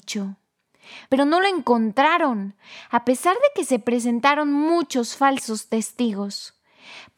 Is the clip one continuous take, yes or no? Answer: no